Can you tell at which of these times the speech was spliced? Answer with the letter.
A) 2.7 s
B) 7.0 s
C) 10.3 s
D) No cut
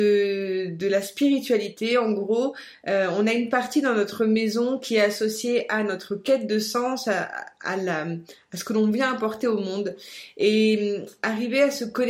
D